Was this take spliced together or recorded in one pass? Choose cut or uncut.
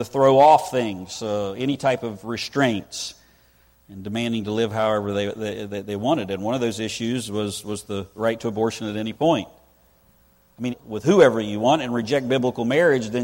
cut